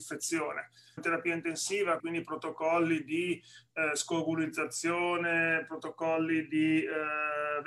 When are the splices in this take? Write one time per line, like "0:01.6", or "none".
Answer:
0:01.0
0:02.0